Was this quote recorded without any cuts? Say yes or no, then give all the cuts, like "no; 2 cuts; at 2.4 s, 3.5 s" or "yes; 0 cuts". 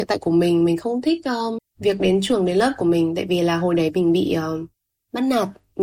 no; 1 cut; at 1.6 s